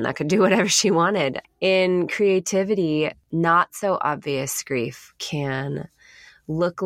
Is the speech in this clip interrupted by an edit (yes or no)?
no